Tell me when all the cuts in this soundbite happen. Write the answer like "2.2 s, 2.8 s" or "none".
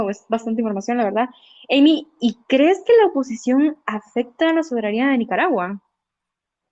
none